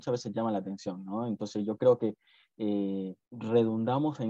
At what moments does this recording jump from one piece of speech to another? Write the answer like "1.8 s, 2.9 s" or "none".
3.2 s